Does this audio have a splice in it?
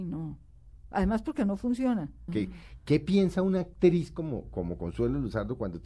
yes; 1 cut; at 2.3 s

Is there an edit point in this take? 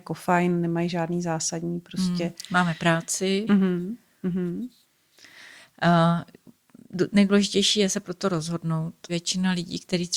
yes; 2 cuts; at 3.5 s, 9.1 s

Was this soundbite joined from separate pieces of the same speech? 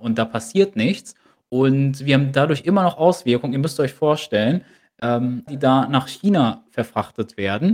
yes; 1 cut; at 5.5 s

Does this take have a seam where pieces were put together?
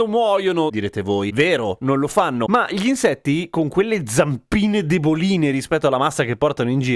no; 0 cuts

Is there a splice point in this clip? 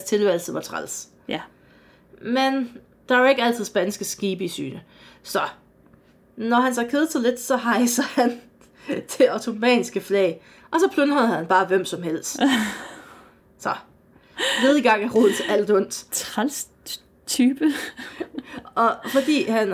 no; 0 cuts

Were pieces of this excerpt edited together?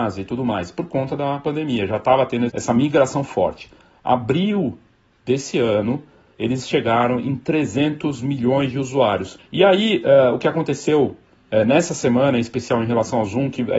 yes; 2 cuts; at 2.5 s, 9.4 s

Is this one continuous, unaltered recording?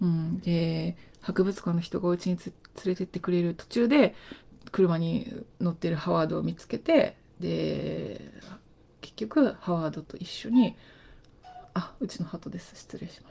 yes; 0 cuts

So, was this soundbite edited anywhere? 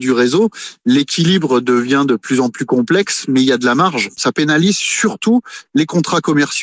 no; 0 cuts

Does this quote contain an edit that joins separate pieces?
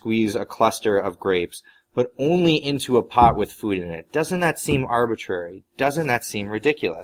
no; 0 cuts

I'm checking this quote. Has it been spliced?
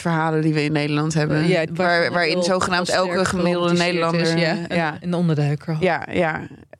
yes; 1 cut; at 1.7 s

